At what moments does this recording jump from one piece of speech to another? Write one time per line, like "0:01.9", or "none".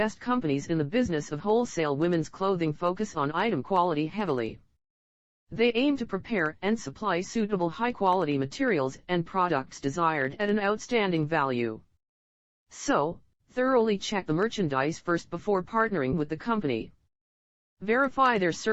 none